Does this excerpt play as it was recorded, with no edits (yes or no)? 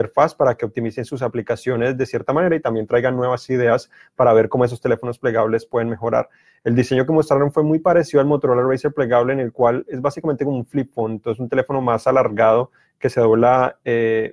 yes